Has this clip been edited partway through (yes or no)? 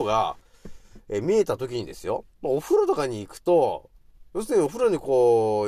yes